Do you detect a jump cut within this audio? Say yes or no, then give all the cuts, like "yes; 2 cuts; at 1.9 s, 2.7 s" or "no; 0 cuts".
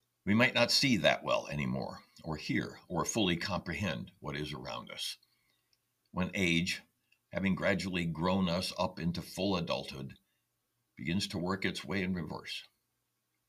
yes; 1 cut; at 6.0 s